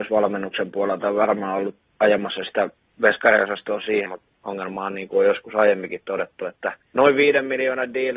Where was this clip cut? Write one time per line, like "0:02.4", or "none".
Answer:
0:04.1